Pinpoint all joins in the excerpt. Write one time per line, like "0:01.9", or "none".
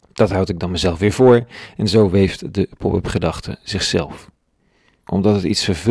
0:05.0